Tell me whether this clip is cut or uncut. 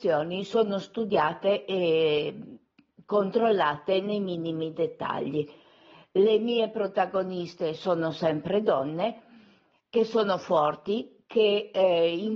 uncut